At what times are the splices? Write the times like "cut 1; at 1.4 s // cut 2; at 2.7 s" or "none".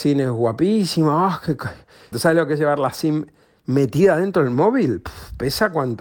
cut 1; at 2.1 s